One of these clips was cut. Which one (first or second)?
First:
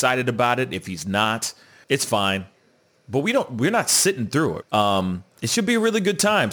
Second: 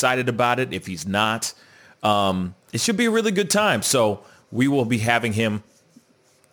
first